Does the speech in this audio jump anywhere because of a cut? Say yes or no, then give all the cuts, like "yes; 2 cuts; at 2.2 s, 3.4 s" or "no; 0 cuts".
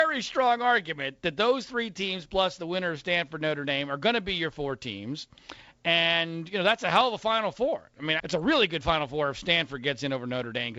yes; 1 cut; at 8.2 s